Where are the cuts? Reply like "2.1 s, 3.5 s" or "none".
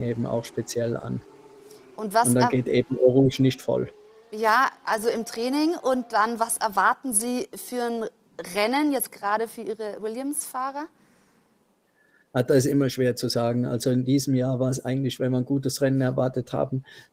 none